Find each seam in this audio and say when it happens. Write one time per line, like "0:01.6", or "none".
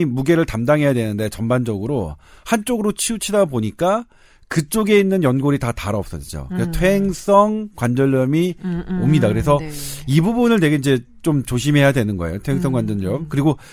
none